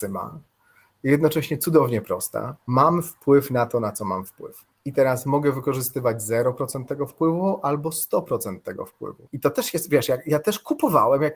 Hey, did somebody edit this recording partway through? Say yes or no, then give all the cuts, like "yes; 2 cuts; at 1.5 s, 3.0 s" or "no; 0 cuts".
yes; 2 cuts; at 4.7 s, 9.3 s